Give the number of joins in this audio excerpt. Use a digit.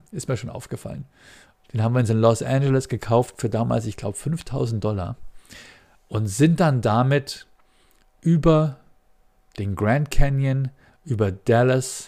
2